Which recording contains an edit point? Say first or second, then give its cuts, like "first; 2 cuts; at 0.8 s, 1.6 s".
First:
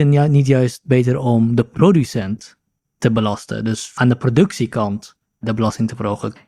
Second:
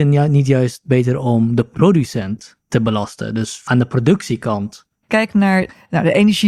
second; 2 cuts; at 2.6 s, 5.0 s